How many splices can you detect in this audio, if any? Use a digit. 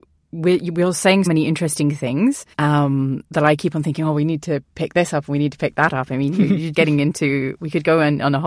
3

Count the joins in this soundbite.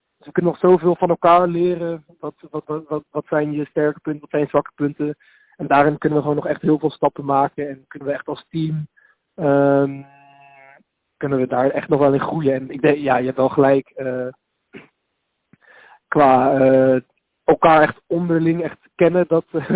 1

